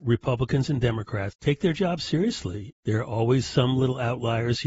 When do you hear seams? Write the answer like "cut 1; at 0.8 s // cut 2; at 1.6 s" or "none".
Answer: cut 1; at 1.3 s // cut 2; at 2.7 s